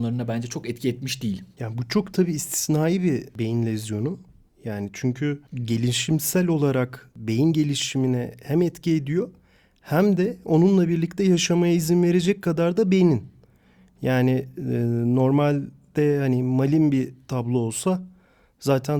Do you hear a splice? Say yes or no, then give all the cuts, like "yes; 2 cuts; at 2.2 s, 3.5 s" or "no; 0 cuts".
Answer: yes; 1 cut; at 1.5 s